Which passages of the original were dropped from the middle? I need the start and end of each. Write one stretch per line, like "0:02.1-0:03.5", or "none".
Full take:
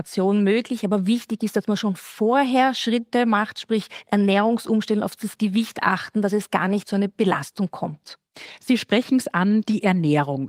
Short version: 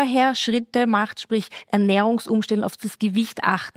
none